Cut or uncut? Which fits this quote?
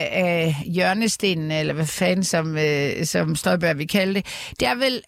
uncut